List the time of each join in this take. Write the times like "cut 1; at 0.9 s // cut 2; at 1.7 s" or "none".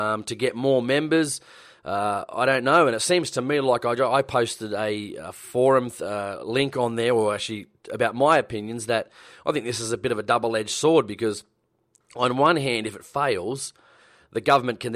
none